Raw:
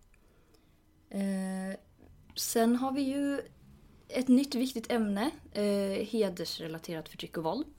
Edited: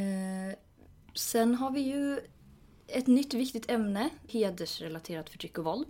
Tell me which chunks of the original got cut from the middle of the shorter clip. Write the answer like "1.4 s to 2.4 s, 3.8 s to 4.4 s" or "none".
5.5 s to 6.1 s